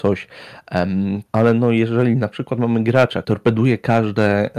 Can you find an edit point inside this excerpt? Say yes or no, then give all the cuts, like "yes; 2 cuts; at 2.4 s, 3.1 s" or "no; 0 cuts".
yes; 2 cuts; at 1.3 s, 3.2 s